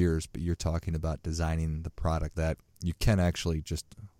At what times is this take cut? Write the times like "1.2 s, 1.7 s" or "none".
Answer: 2.3 s